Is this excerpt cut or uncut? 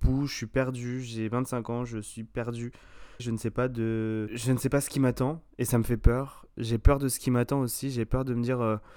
cut